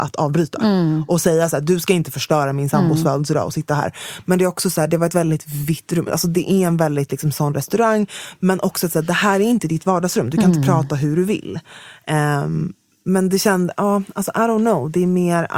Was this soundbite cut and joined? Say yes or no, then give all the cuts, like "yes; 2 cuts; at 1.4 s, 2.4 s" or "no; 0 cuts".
no; 0 cuts